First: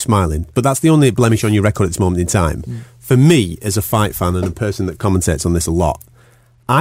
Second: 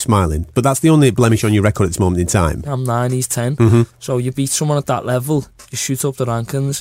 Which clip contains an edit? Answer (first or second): second